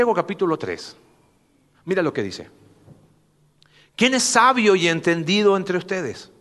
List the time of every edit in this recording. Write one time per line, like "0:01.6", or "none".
none